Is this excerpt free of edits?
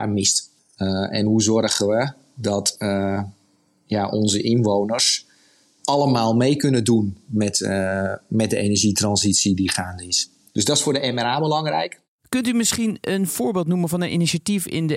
yes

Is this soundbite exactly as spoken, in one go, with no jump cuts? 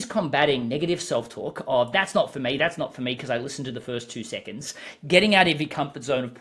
yes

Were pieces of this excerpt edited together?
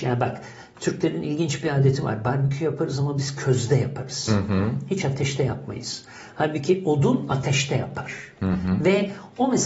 no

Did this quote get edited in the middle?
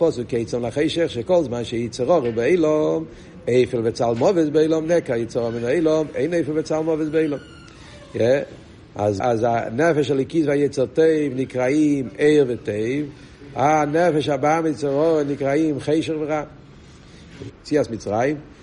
yes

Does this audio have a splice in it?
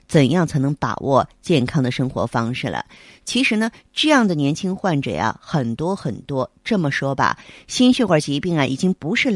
no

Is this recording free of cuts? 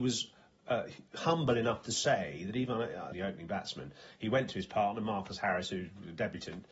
no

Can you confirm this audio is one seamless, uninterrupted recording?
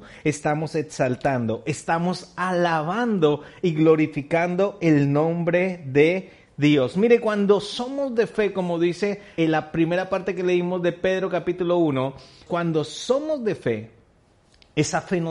no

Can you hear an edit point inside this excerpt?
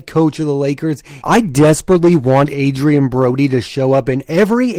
yes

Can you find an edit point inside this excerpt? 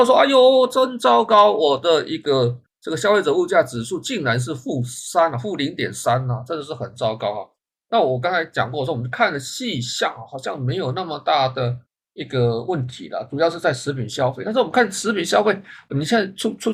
no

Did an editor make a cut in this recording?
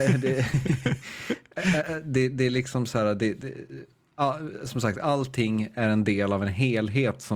no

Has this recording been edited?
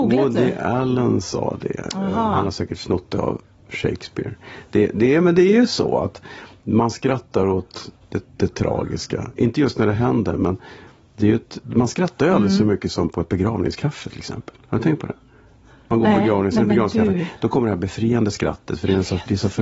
no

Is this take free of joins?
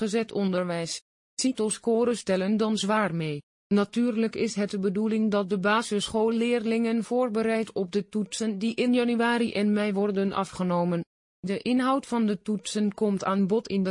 no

